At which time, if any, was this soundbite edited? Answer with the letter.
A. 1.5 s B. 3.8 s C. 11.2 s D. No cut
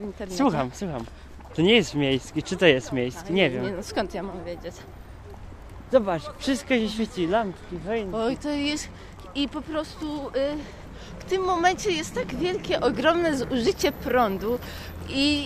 A